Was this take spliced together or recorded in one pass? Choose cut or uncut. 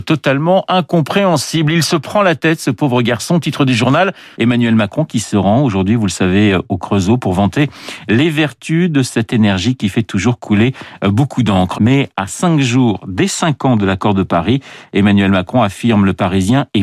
cut